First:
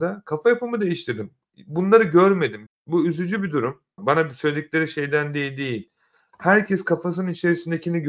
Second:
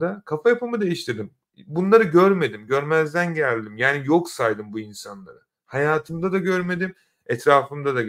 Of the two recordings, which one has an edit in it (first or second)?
first